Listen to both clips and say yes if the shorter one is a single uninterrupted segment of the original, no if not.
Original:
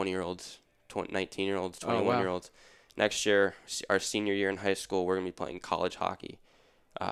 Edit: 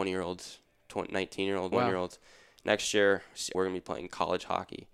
no